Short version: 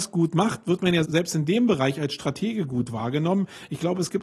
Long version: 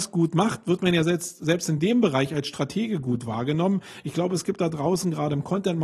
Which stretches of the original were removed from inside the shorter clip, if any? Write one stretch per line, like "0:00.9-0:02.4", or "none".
0:01.0-0:01.4

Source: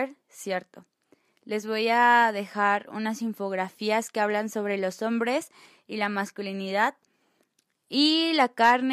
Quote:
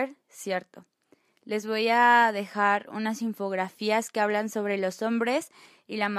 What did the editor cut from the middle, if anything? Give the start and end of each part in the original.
none

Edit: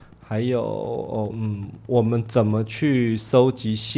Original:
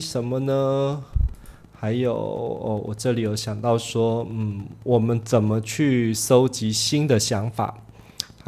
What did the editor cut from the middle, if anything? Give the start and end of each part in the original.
0:02.8-0:04.3

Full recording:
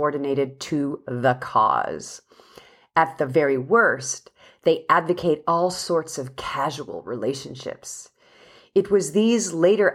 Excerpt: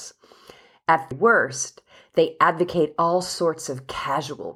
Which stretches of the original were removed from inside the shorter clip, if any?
0:03.2-0:03.6

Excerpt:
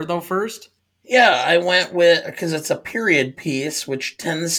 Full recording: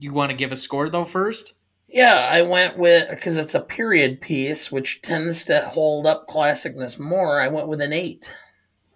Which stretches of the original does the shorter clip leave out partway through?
none

